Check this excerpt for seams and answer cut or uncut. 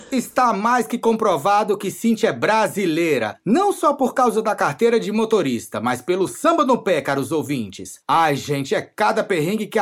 uncut